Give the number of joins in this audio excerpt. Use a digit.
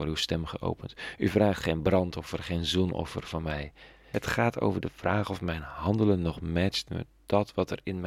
1